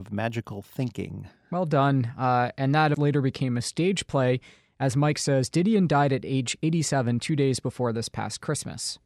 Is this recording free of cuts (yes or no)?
no